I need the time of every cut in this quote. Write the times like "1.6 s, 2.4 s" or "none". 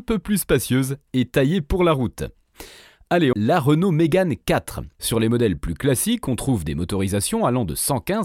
3.3 s, 5.0 s